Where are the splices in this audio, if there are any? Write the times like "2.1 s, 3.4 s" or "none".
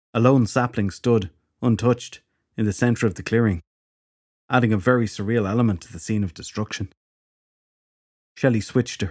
none